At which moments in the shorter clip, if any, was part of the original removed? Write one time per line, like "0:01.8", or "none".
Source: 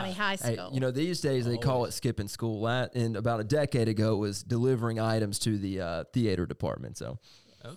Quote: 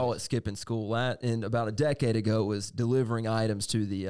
none